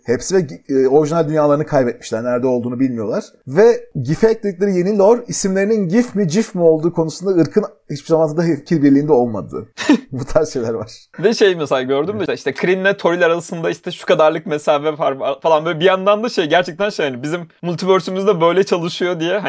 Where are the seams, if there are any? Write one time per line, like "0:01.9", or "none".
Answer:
0:12.3